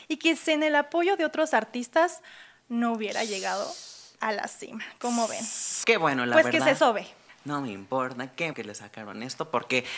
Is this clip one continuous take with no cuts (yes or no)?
no